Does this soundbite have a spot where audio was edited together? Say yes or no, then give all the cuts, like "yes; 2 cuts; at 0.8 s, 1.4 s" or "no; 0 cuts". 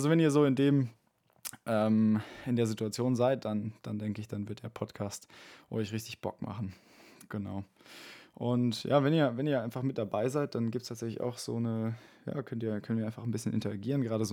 no; 0 cuts